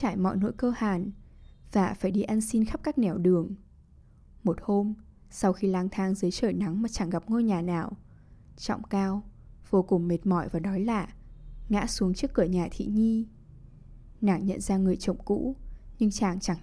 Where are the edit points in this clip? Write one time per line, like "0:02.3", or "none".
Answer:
none